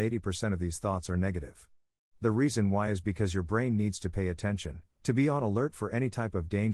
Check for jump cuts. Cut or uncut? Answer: uncut